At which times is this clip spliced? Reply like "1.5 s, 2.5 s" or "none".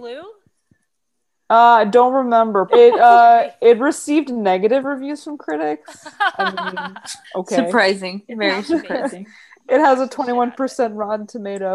2.7 s, 7.2 s

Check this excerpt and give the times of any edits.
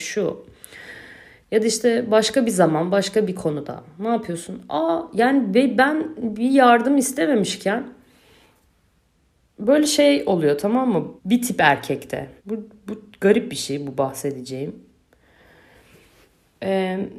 11.2 s, 12.4 s

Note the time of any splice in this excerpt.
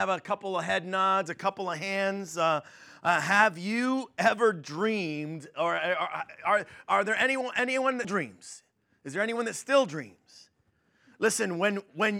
8.0 s

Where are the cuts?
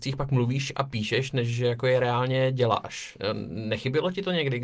none

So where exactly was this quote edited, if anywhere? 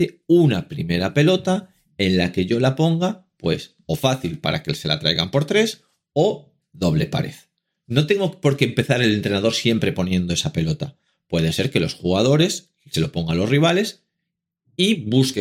none

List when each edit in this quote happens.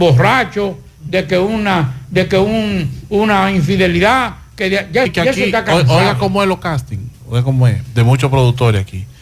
5.1 s

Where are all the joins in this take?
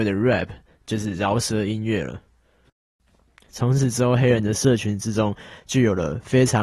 3.5 s

